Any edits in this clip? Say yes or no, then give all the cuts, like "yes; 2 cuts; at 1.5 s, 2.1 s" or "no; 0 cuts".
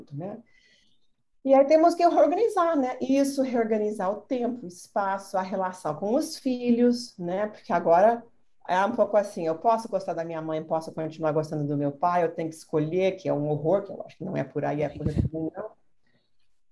no; 0 cuts